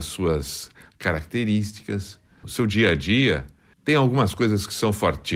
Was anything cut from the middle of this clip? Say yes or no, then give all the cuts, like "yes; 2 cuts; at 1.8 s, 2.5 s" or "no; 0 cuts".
yes; 2 cuts; at 2.4 s, 3.7 s